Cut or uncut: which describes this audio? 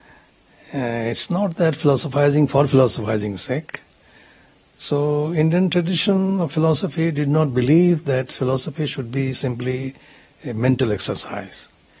uncut